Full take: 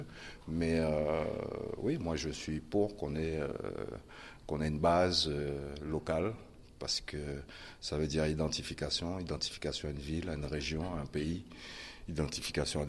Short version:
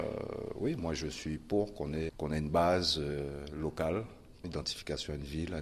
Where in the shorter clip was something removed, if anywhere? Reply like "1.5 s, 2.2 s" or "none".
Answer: 2.1 s, 4.4 s